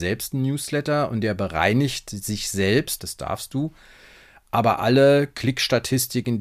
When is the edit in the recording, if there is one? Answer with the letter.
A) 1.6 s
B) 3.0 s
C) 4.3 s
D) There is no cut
B